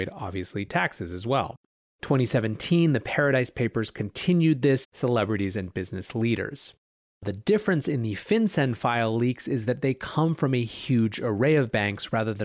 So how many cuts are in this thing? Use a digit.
1